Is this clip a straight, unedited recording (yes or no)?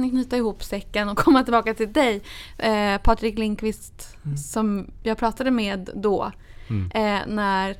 no